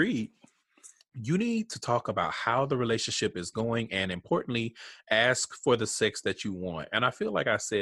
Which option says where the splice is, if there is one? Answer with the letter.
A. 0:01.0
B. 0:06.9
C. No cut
A